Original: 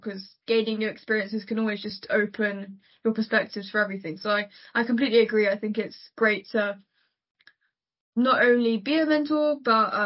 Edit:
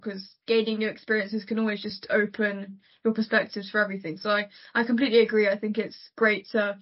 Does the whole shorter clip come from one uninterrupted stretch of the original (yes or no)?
yes